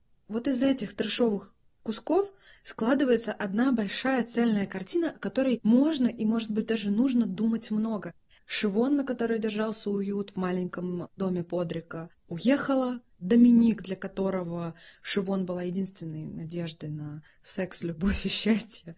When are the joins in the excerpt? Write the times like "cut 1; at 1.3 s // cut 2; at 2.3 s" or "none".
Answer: cut 1; at 8.4 s